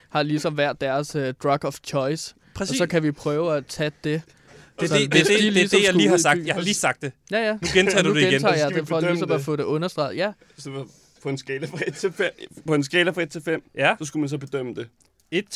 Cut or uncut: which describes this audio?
uncut